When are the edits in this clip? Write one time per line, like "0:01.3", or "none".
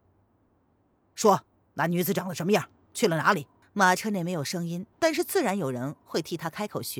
0:03.6
0:04.9